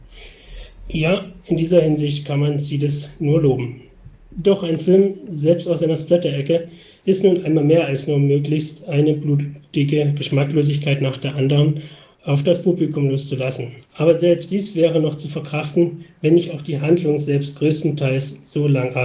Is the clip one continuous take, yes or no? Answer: no